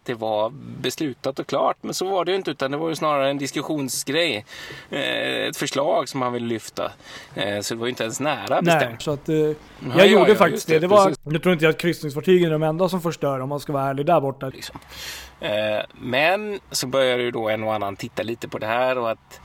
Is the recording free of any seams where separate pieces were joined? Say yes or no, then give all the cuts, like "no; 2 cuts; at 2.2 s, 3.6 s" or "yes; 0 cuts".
no; 3 cuts; at 9.0 s, 11.2 s, 14.5 s